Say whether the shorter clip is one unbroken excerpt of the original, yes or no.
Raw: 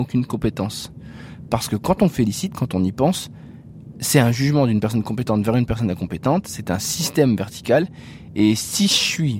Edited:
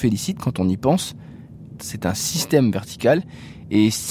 no